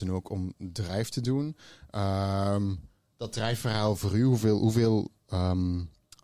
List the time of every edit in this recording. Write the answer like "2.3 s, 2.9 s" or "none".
none